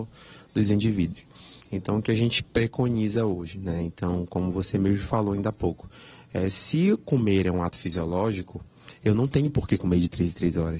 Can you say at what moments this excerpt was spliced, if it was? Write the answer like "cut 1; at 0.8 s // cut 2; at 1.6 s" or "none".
none